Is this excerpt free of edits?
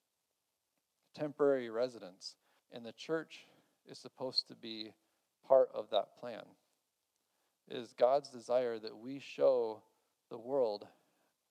no; 1 cut; at 2.6 s

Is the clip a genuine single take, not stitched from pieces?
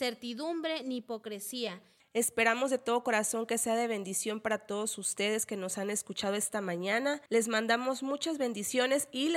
no; 2 cuts; at 2.0 s, 7.3 s

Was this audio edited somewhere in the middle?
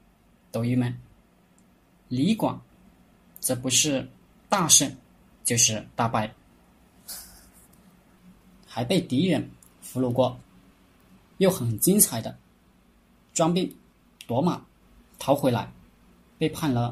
no; 0 cuts

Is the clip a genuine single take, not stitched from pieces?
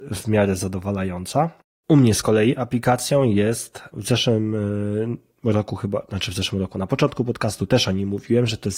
no; 1 cut; at 3.9 s

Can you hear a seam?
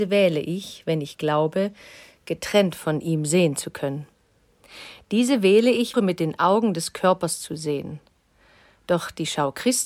yes; 1 cut; at 5.9 s

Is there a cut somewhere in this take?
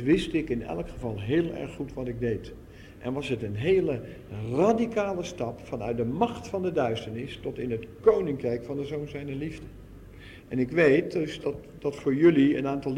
yes; 2 cuts; at 10.4 s, 11.4 s

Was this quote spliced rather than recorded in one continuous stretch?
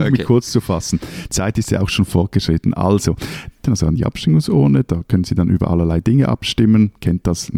yes; 1 cut; at 3.6 s

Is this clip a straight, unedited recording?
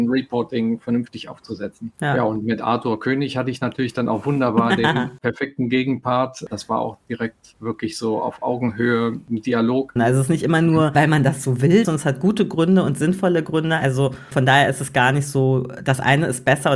no; 2 cuts; at 10.0 s, 11.8 s

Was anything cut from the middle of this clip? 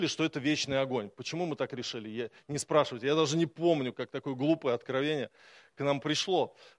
no; 0 cuts

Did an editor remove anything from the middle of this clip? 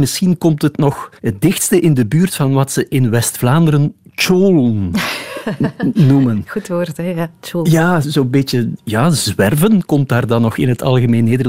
yes; 2 cuts; at 1.2 s, 8.0 s

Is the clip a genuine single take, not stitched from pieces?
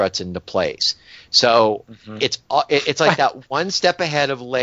yes; 0 cuts

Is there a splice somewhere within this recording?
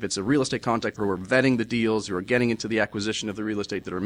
yes; 1 cut; at 0.9 s

